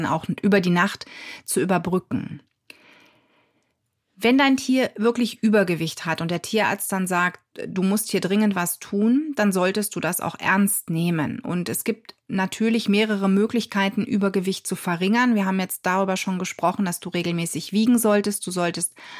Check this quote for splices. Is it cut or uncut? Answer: uncut